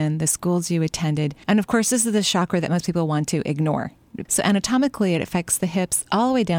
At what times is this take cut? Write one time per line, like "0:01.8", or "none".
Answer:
0:01.4
0:04.3